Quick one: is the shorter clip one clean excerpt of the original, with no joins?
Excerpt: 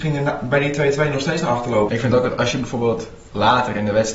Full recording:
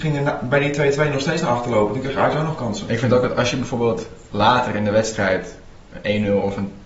no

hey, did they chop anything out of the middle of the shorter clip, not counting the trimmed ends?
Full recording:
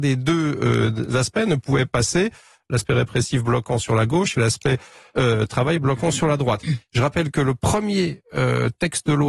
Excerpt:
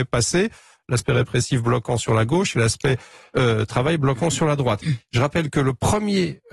no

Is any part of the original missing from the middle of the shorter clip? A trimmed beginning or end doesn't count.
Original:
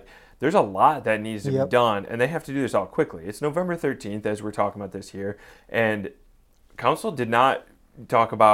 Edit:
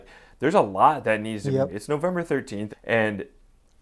yes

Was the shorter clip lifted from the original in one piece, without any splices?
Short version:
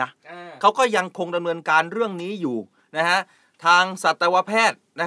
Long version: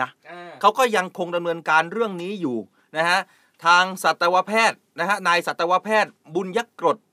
yes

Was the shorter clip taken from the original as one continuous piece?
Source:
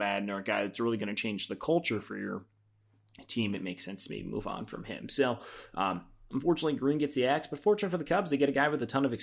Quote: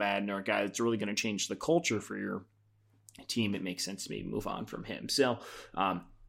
yes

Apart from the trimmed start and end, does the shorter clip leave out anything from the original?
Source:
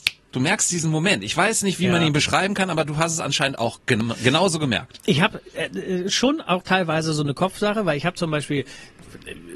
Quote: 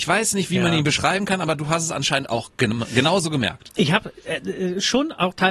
no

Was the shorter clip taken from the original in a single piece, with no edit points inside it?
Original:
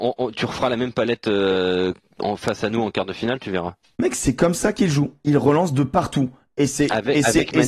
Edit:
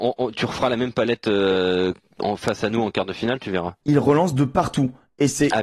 no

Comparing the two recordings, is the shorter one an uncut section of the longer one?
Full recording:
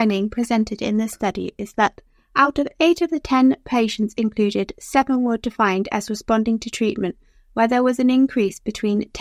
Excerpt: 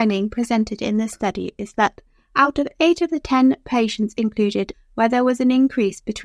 no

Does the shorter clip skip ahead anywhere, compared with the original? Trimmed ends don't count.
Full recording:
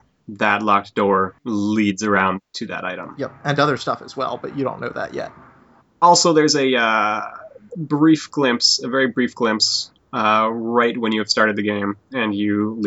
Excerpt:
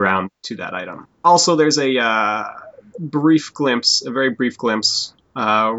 yes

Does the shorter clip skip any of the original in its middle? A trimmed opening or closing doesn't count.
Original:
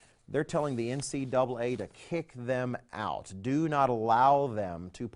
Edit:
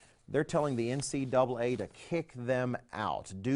no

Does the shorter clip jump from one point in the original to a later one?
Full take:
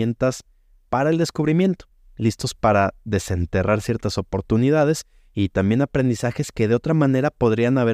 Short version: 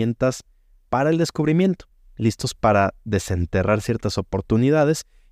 no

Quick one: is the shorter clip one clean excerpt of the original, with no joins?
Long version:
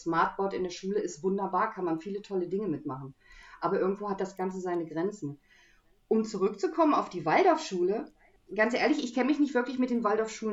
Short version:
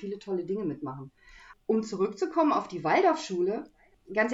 no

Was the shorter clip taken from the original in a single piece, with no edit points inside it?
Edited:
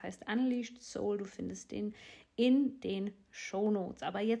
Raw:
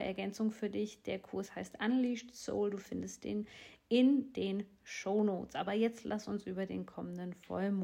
yes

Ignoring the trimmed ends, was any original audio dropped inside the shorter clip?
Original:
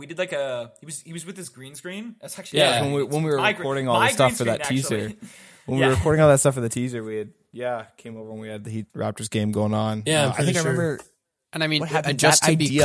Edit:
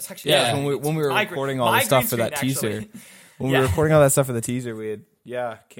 no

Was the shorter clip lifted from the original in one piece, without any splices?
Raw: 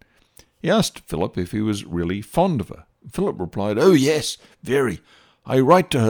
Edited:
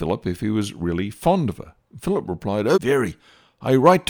no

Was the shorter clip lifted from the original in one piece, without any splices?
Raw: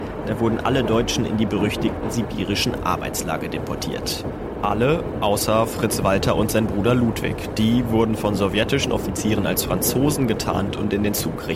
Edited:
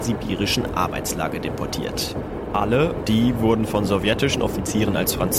no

